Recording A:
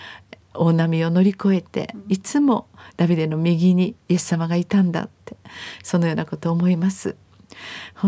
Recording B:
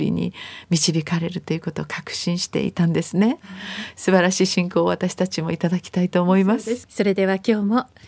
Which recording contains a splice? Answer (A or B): B